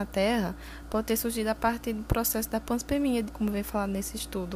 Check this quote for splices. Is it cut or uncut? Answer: cut